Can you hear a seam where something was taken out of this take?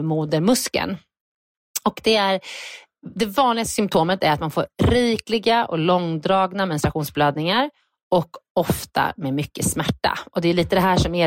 no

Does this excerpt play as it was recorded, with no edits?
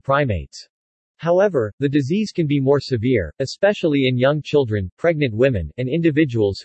no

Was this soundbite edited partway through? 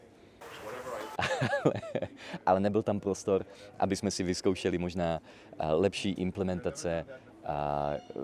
yes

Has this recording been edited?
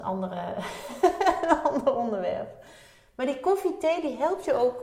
no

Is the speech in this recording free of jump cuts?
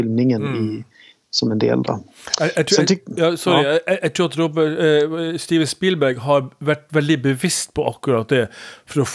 yes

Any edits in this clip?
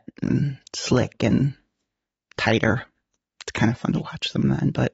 no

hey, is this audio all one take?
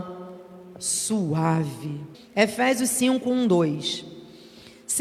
no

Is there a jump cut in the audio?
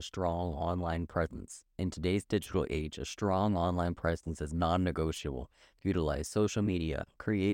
no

